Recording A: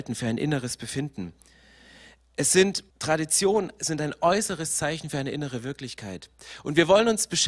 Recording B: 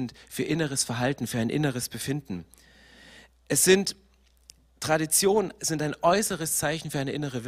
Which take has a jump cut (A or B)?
A